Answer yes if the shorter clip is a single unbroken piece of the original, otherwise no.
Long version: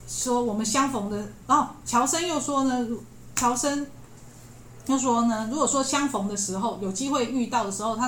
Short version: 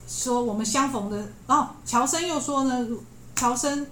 yes